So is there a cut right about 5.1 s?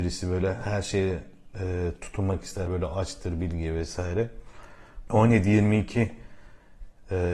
yes; 2 cuts; at 2.7 s, 5.1 s

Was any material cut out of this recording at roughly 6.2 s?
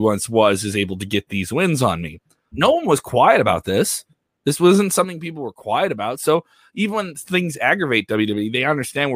no; 1 cut; at 2.5 s

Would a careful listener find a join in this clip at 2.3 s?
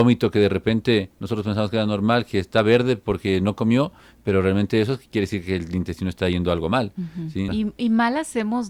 no; 1 cut; at 7.5 s

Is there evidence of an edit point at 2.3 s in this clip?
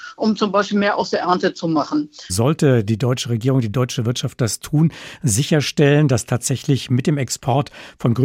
yes; 1 cut; at 2.3 s

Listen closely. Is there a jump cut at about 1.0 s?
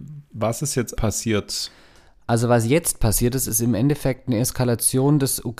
yes; 1 cut; at 1.0 s

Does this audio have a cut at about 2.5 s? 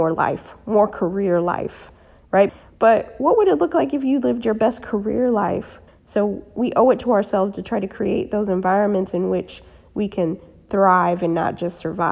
yes; 2 cuts; at 2.5 s, 5.9 s

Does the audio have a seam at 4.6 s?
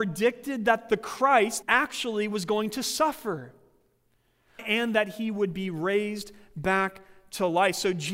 yes; 2 cuts; at 1.6 s, 4.6 s

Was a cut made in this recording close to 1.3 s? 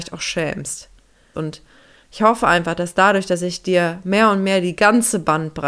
yes; 1 cut; at 1.3 s

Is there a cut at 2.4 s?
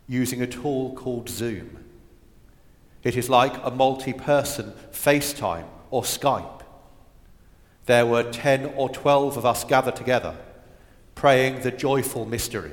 no; 0 cuts

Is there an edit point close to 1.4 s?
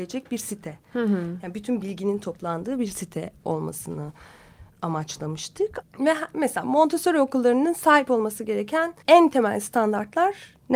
no; 2 cuts; at 5.8 s, 9.0 s

